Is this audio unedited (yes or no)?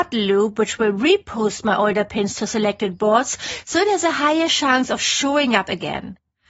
yes